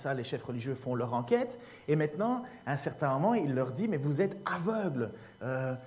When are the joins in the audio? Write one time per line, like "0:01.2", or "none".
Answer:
none